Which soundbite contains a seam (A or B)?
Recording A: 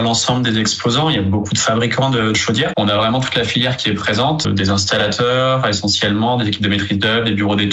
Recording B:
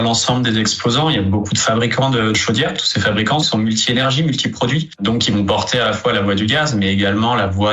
A